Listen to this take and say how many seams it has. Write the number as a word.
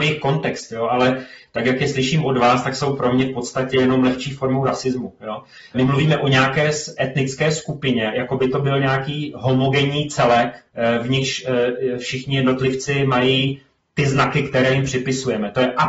two